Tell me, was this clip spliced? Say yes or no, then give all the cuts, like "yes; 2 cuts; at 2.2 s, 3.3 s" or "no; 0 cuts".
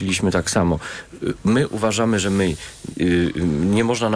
no; 0 cuts